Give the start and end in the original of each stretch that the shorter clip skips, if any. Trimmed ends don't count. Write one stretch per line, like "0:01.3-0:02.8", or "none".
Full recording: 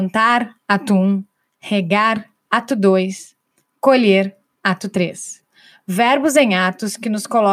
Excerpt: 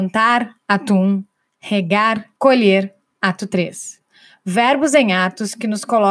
0:02.4-0:03.8